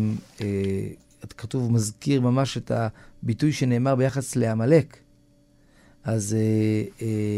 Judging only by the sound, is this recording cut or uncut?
uncut